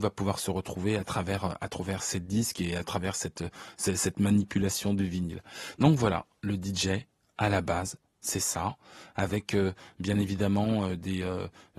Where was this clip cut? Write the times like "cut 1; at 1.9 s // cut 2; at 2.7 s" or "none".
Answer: none